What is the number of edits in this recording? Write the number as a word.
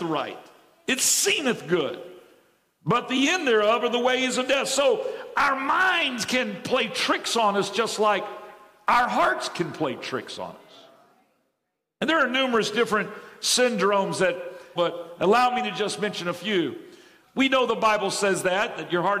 two